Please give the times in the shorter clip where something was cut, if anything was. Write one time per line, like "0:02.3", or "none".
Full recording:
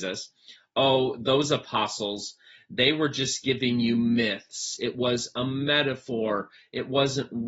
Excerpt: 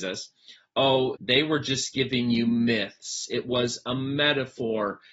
0:01.2